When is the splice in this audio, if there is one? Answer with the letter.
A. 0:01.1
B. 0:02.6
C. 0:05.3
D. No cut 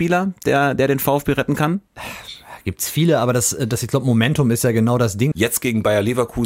C